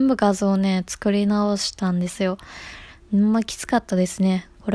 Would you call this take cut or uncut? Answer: cut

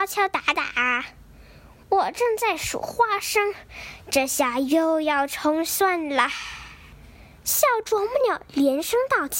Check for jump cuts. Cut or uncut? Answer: uncut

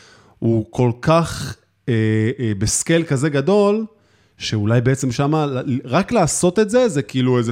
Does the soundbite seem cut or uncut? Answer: uncut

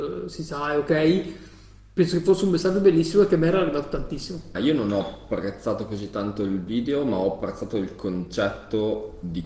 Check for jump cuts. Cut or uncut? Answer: cut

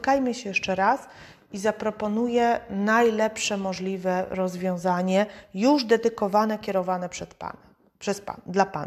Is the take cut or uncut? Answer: uncut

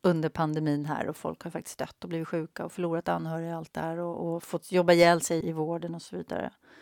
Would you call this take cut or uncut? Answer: cut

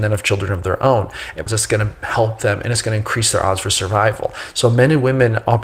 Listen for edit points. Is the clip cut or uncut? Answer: cut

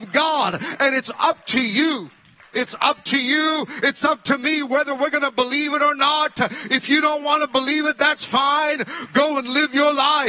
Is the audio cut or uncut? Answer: cut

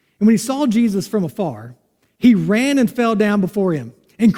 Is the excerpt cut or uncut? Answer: uncut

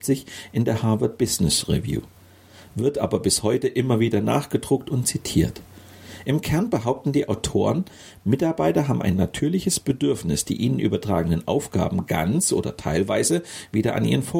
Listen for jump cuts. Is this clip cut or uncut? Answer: uncut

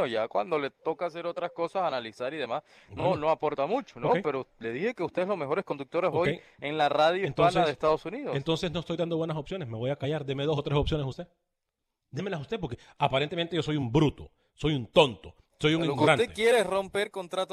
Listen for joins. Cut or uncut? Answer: uncut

